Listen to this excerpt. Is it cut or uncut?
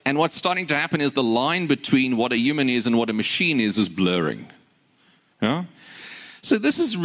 uncut